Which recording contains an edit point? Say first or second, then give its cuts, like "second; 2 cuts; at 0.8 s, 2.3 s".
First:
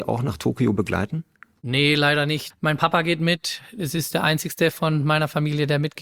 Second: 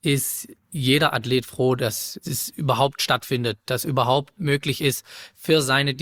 first; 1 cut; at 2.5 s